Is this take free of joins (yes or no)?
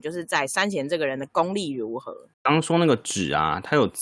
no